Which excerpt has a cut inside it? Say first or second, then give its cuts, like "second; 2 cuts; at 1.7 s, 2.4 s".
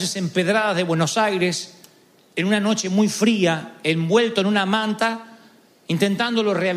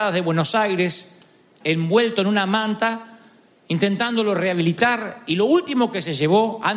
second; 1 cut; at 1.6 s